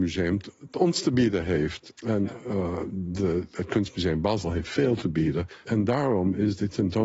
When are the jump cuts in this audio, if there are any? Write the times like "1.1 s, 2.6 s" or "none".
2.0 s, 5.6 s